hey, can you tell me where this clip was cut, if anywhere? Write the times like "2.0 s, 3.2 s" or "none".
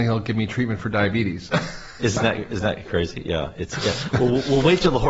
2.2 s